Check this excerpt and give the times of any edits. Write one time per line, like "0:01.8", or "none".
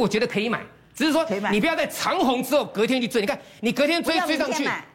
none